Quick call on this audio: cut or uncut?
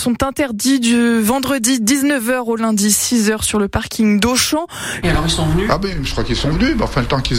cut